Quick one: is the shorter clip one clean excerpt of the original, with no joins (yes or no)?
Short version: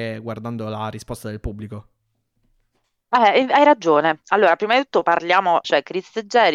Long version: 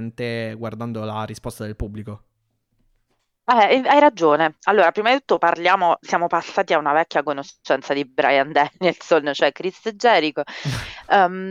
no